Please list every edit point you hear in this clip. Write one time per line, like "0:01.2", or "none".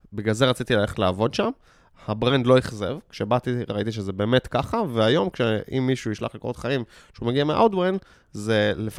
none